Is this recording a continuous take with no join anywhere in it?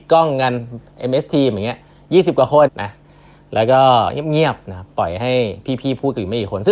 no; 1 cut; at 2.7 s

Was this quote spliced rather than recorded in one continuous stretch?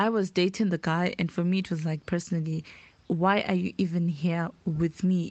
no; 0 cuts

